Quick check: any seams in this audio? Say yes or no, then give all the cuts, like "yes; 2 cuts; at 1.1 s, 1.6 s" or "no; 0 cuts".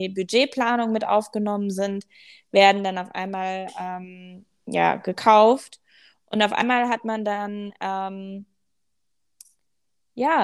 no; 0 cuts